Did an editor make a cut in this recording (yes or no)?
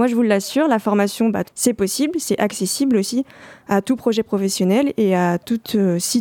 yes